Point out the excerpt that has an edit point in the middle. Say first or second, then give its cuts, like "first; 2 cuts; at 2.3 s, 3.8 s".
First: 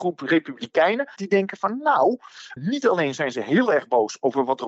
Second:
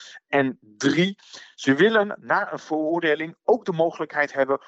first; 2 cuts; at 1.2 s, 2.6 s